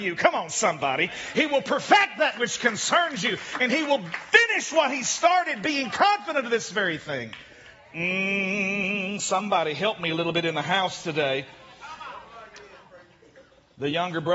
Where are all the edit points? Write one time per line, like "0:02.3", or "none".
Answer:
none